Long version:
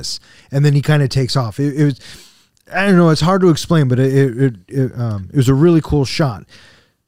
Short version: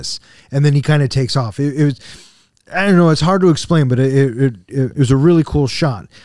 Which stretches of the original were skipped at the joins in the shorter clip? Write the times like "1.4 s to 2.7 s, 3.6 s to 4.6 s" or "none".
4.9 s to 5.3 s